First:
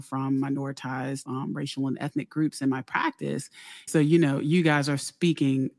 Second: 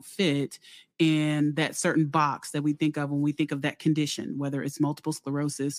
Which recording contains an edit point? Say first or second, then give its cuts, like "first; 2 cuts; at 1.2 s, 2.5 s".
first; 2 cuts; at 1.3 s, 3.9 s